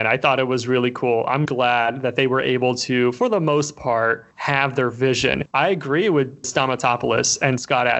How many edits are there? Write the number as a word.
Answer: two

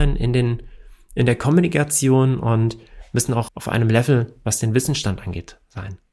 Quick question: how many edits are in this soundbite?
one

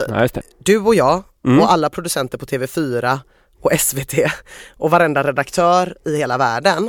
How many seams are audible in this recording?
zero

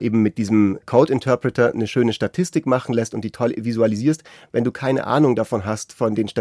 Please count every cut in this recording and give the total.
zero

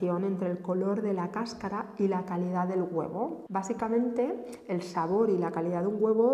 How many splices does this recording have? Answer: one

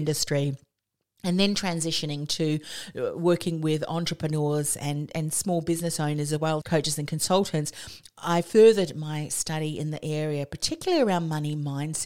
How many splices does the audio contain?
one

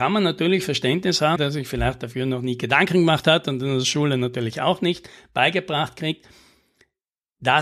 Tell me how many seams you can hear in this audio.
one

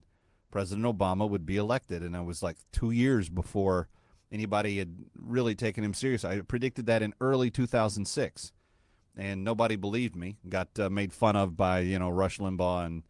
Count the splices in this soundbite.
zero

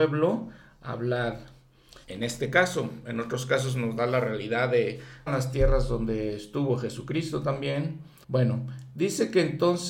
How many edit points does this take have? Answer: three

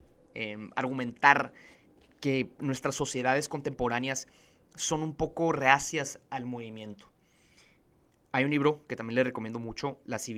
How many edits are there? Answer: zero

